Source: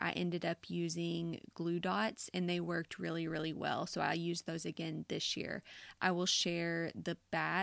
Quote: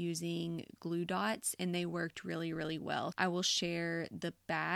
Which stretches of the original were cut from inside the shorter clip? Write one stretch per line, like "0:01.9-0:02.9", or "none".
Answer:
0:03.9-0:06.0